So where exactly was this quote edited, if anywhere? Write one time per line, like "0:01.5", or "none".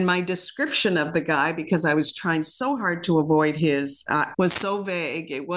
0:04.3